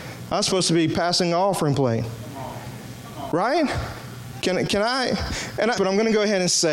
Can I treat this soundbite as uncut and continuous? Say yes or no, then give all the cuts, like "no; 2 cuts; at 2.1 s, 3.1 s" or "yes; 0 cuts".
no; 2 cuts; at 4.4 s, 5.8 s